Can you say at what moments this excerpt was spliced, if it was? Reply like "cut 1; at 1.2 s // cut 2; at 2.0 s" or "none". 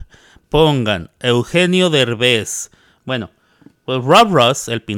cut 1; at 3.0 s